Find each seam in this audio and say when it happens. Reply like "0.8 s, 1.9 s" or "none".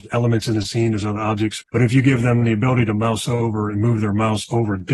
1.6 s